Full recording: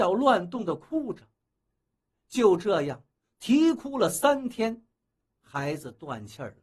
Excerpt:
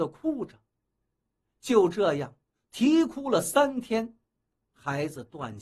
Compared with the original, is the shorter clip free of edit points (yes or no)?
yes